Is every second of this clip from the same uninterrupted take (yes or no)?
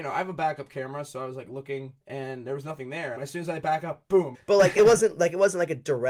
no